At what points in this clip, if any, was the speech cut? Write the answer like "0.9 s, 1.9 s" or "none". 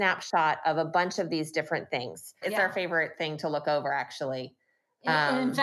2.4 s